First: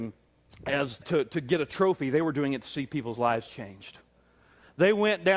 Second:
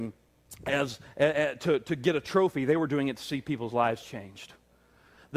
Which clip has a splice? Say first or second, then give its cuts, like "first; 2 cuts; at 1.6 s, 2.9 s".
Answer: first; 1 cut; at 1.0 s